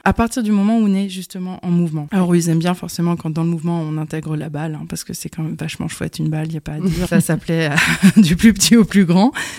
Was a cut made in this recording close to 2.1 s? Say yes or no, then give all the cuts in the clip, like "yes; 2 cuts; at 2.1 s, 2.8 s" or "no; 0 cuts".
no; 1 cut; at 7.0 s